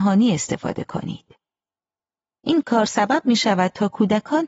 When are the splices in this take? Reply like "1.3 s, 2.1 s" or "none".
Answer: 2.4 s